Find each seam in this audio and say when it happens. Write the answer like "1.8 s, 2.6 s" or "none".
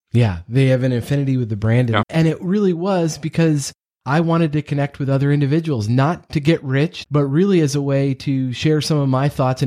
2.0 s, 7.0 s